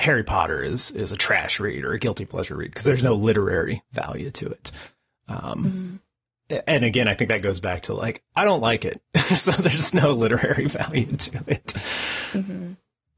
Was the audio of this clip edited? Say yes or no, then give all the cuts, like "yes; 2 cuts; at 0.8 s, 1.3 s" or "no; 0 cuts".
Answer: no; 0 cuts